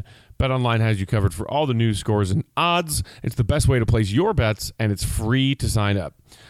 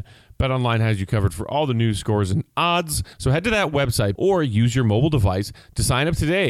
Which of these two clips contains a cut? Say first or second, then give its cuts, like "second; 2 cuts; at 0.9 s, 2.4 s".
second; 2 cuts; at 3.1 s, 4.2 s